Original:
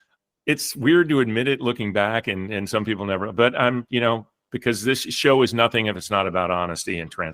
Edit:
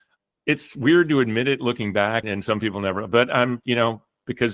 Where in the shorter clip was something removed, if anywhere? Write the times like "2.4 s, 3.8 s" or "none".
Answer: 2.2 s